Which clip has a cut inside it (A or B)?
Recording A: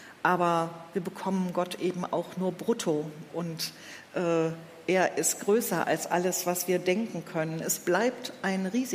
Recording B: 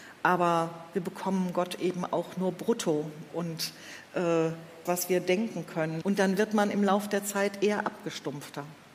B